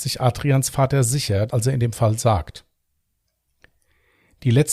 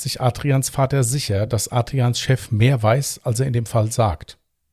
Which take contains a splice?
first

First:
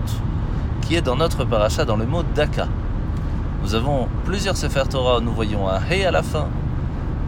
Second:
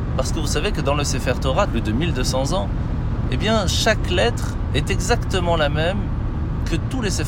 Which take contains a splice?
second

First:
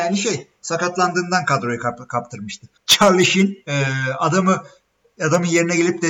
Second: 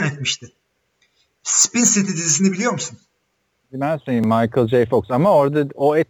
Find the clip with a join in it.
first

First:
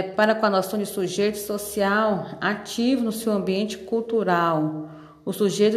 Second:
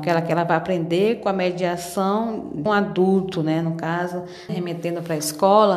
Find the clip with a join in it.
second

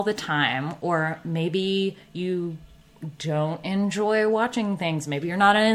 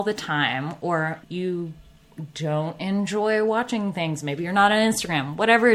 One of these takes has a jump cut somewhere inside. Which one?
second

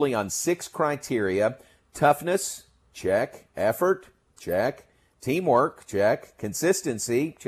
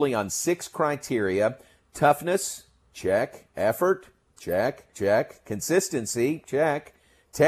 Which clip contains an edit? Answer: second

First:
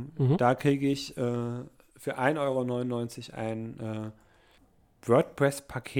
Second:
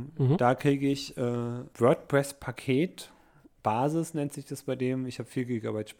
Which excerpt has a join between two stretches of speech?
second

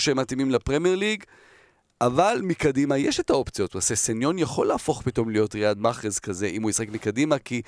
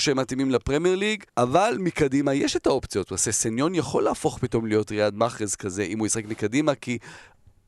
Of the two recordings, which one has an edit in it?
second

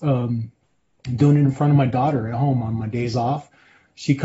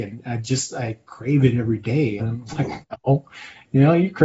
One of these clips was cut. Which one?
second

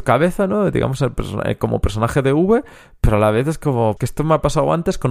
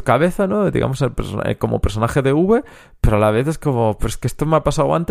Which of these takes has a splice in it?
first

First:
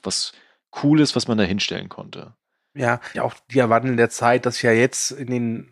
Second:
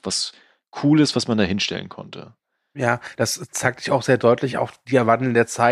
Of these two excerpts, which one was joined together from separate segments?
first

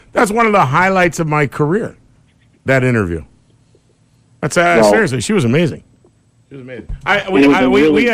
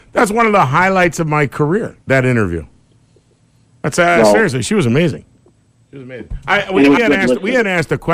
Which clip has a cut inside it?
second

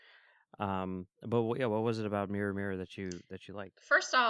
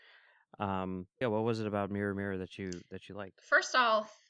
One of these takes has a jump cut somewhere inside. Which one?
second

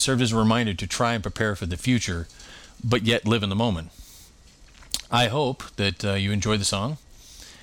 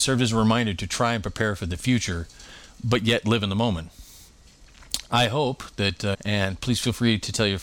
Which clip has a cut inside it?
second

